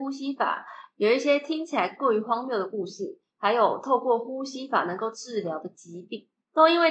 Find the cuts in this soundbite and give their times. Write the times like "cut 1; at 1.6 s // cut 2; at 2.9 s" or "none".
none